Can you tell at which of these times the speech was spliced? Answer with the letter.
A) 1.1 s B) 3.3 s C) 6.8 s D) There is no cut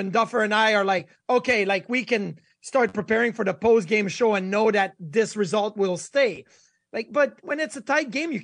D